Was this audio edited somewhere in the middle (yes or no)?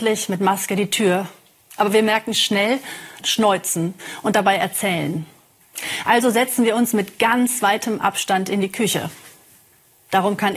yes